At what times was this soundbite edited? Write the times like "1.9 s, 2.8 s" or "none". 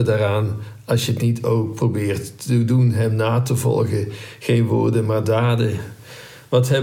none